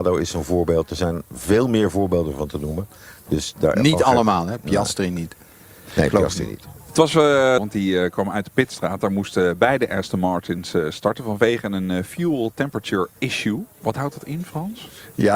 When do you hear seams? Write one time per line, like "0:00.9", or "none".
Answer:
0:07.6